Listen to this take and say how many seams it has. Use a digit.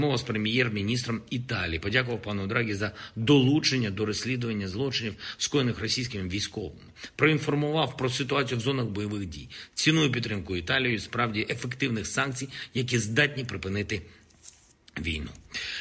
0